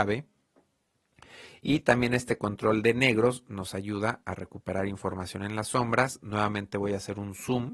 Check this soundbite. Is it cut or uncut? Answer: uncut